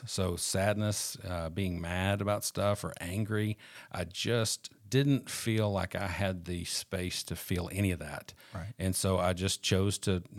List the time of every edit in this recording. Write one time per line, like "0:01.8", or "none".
none